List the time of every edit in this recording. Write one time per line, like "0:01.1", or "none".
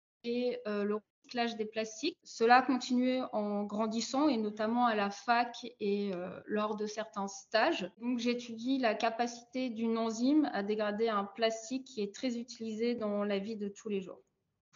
0:02.2
0:07.9